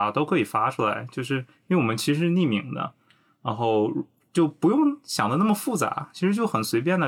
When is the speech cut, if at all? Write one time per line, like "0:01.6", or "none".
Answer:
none